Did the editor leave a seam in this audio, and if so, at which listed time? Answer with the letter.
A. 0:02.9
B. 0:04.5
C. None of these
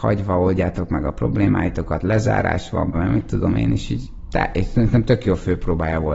A